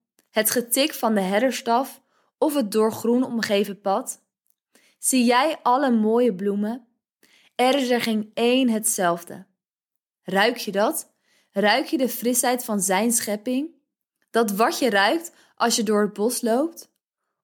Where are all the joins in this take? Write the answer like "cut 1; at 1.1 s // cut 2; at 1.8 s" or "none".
none